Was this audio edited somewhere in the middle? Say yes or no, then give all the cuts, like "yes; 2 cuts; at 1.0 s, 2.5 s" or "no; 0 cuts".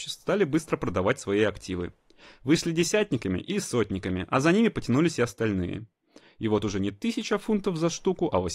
no; 0 cuts